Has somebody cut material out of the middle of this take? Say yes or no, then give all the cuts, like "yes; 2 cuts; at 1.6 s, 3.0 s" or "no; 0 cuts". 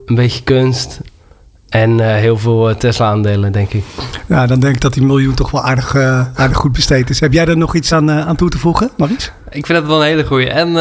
no; 0 cuts